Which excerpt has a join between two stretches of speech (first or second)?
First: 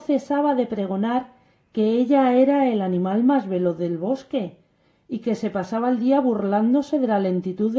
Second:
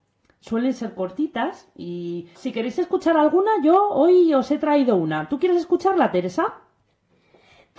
second